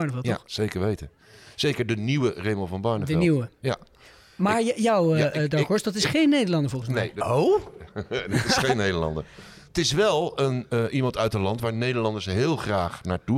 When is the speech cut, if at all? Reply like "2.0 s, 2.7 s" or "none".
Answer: none